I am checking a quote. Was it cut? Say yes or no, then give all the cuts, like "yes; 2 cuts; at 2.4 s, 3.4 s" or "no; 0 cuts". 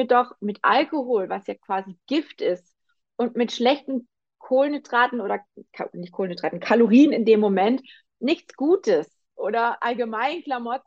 yes; 1 cut; at 9.3 s